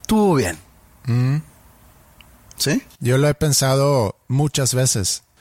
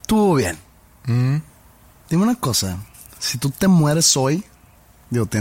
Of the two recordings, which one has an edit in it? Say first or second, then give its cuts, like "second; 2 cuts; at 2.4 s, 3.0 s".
second; 1 cut; at 2.0 s